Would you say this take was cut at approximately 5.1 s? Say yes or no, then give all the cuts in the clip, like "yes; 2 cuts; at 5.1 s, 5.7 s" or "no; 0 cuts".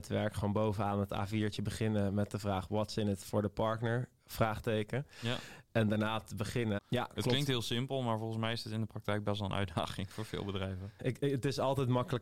no; 2 cuts; at 6.8 s, 11.0 s